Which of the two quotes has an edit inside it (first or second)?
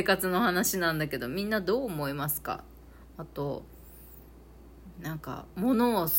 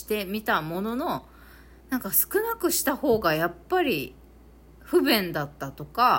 second